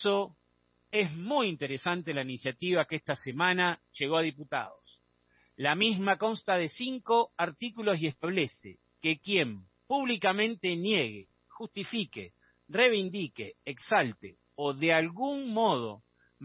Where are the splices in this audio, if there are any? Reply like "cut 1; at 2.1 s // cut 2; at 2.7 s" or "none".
none